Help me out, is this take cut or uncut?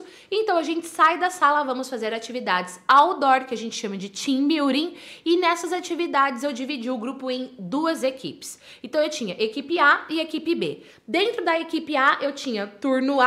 uncut